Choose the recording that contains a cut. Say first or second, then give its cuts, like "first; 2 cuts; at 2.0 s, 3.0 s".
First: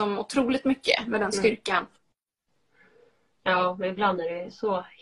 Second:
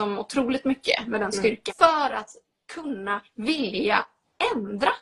second; 1 cut; at 1.7 s